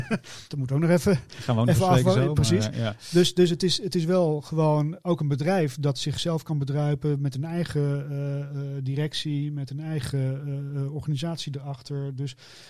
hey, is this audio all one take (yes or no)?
yes